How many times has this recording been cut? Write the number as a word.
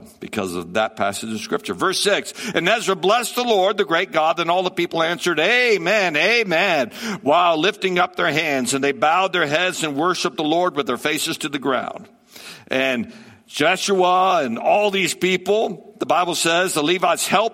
zero